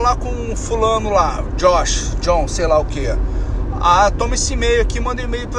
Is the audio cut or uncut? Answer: uncut